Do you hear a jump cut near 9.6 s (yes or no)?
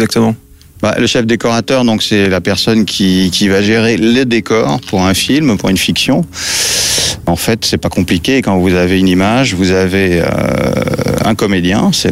no